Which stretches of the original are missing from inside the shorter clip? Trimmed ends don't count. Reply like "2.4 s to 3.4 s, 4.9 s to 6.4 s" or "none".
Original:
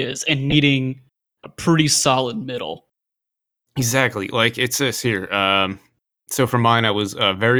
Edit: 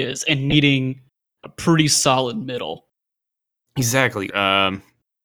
4.3 s to 5.3 s